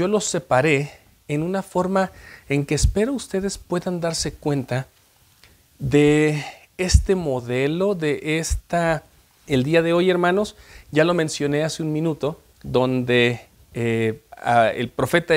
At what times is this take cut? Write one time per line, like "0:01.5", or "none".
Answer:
0:09.5
0:12.5